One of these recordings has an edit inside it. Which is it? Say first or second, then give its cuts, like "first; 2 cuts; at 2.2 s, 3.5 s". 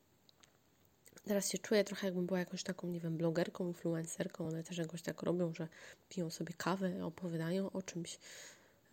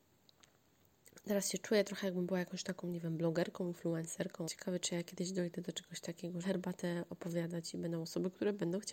second; 2 cuts; at 4.4 s, 6.4 s